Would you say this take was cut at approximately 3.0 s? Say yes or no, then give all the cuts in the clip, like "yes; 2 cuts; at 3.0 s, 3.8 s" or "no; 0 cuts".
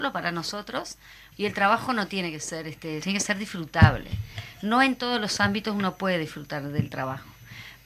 yes; 2 cuts; at 1.3 s, 3.0 s